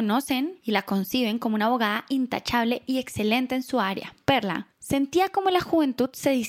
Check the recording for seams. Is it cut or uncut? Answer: cut